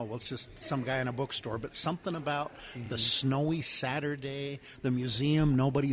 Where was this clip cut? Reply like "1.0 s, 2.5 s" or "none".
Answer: none

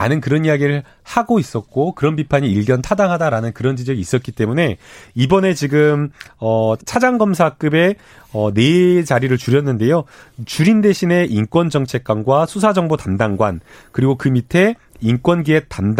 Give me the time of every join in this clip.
6.8 s

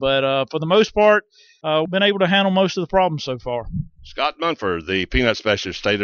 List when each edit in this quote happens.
none

